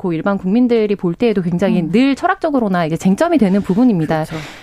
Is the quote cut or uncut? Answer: uncut